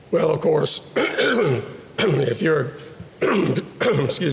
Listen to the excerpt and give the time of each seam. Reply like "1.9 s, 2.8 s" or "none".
none